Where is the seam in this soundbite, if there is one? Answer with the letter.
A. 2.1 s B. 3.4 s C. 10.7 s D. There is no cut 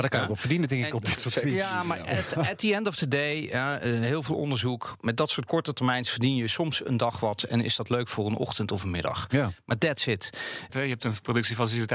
C